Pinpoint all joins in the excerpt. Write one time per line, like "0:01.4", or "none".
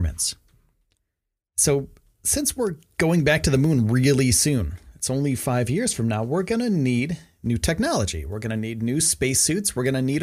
none